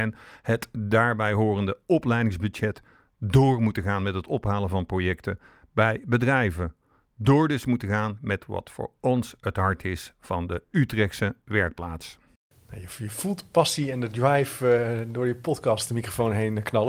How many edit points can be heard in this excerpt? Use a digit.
0